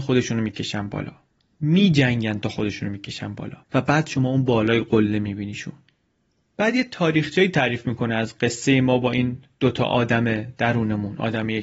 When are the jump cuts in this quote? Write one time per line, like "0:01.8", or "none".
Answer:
0:03.6

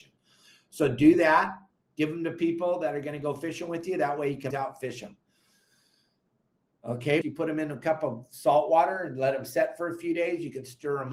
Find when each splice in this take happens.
0:04.5
0:07.2

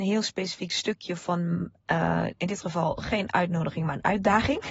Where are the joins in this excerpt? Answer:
none

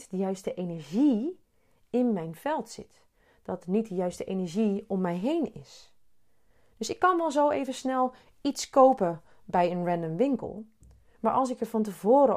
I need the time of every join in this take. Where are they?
none

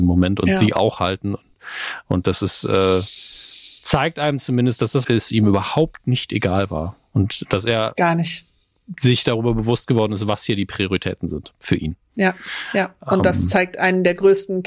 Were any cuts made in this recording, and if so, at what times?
0:03.8
0:05.0

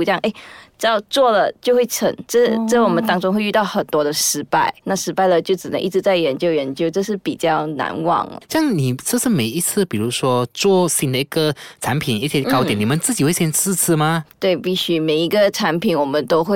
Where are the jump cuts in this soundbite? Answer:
0:04.8

